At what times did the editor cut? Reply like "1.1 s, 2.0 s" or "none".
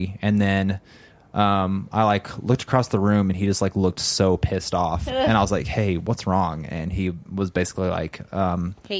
none